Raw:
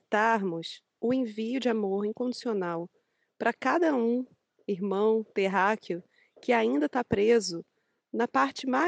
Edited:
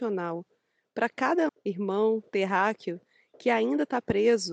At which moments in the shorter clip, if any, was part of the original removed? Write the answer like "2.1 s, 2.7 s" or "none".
1.5 s